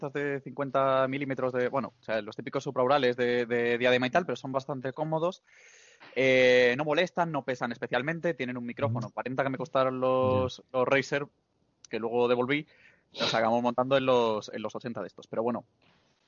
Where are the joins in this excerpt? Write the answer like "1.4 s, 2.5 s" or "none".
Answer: 9.1 s